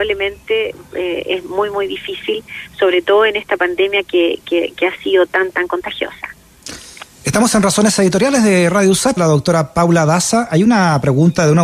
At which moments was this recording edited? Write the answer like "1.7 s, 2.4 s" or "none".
9.2 s